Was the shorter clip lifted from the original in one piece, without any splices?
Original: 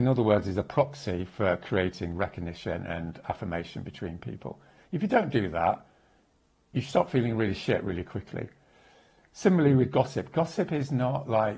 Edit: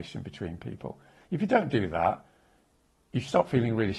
yes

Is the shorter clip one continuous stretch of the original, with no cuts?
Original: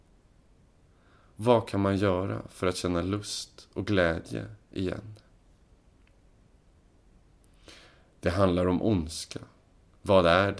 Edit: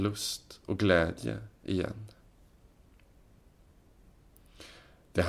yes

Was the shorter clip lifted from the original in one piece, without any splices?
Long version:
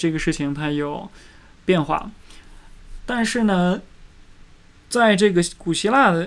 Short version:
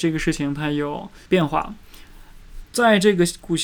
no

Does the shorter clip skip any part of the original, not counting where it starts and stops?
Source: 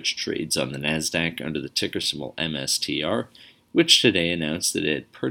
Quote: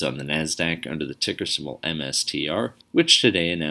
yes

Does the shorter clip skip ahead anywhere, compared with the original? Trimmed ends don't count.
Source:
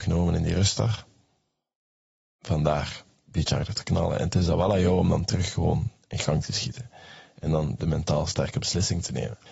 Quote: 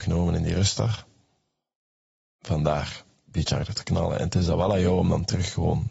no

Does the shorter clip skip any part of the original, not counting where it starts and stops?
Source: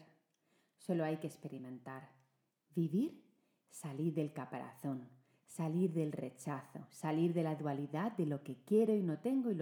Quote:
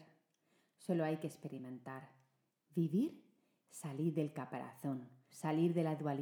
yes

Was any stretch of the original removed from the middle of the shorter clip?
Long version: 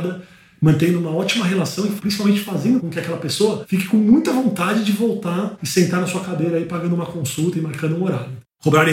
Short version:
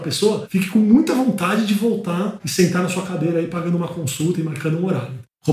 no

